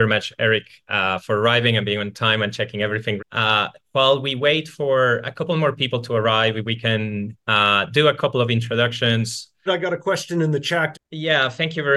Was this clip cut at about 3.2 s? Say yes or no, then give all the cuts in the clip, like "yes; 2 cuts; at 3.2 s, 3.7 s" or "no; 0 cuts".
yes; 3 cuts; at 3.2 s, 9.7 s, 10.9 s